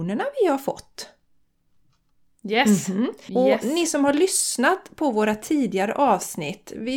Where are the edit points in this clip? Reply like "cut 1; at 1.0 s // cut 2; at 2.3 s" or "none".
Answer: cut 1; at 3.3 s